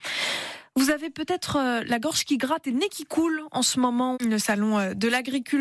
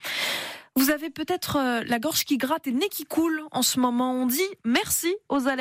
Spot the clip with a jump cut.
first; 1 cut; at 4.1 s

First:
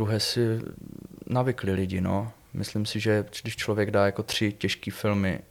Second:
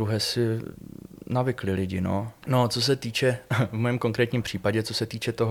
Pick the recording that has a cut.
second; 1 cut; at 2.4 s

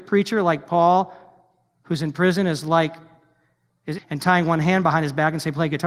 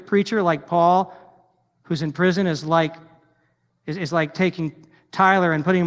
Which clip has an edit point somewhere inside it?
first; 1 cut; at 4.0 s

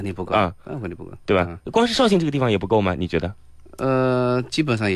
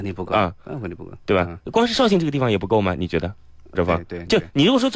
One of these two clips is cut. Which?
second; 1 cut; at 3.8 s

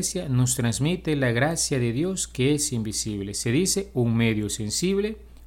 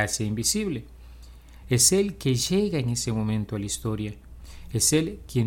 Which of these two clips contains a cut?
second; 1 cut; at 1.6 s

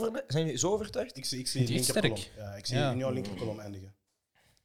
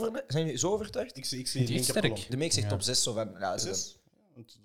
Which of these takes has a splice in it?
second; 2 cuts; at 2.3 s, 3.6 s

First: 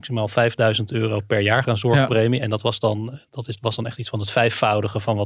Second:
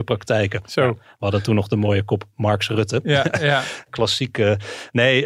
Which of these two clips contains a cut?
first; 1 cut; at 1.6 s

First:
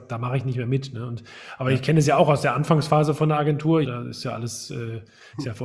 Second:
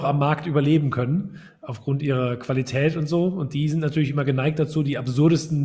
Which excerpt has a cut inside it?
first; 1 cut; at 3.8 s

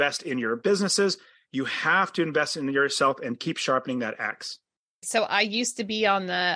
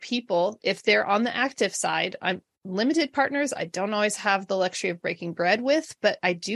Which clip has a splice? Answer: first; 1 cut; at 5.0 s

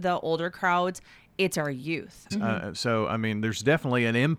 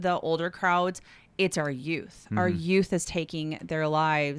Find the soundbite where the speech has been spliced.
first; 1 cut; at 2.3 s

